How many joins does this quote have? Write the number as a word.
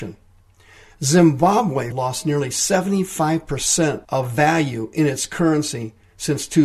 two